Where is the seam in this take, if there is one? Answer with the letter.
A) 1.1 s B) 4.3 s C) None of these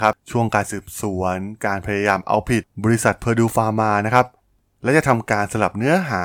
C